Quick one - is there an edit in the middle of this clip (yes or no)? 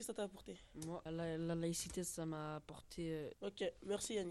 yes